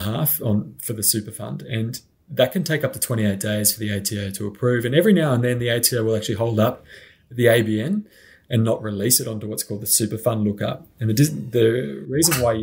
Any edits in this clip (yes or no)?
no